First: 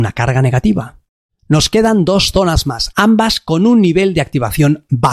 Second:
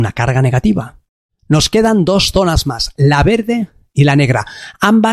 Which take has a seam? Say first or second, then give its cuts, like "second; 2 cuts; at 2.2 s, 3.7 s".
first; 1 cut; at 2.9 s